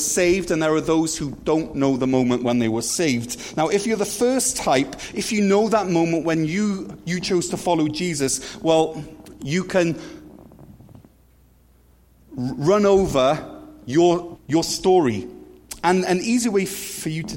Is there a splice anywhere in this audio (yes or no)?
yes